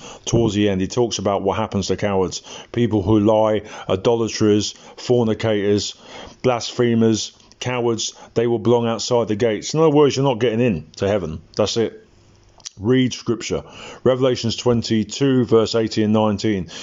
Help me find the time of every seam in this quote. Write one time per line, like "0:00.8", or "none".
none